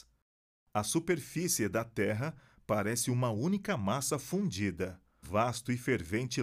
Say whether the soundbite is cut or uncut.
cut